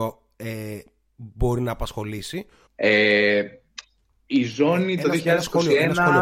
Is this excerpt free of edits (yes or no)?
no